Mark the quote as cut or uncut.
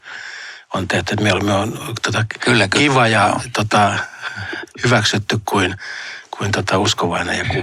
uncut